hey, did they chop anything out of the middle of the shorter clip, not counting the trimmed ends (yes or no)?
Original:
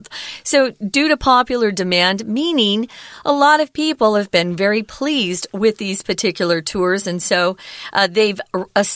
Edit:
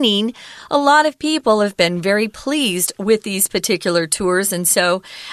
no